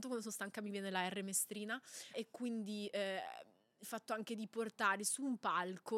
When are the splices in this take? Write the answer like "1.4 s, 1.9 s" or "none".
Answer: 2.1 s